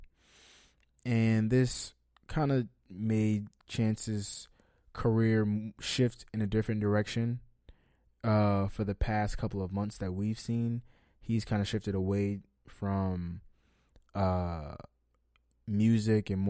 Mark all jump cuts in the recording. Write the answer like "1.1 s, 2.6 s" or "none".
none